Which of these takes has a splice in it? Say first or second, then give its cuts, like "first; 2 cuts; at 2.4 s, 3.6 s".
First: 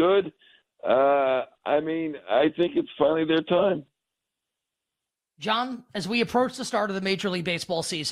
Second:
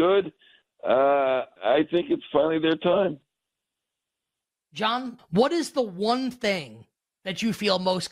second; 2 cuts; at 1.6 s, 5.2 s